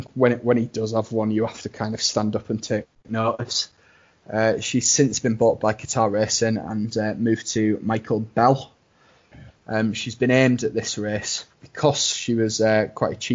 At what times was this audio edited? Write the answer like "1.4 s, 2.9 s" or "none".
9.5 s, 11.5 s